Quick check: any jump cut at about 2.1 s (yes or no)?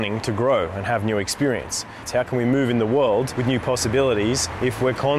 yes